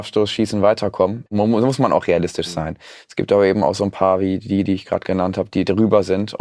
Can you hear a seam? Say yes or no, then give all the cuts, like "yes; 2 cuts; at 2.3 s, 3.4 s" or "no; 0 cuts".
yes; 2 cuts; at 1.3 s, 3.0 s